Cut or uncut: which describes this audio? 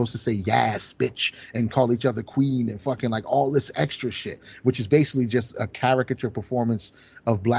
uncut